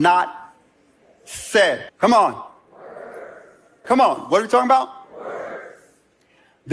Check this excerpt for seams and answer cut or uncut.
cut